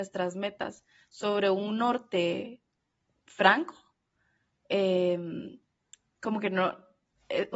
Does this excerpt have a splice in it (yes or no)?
no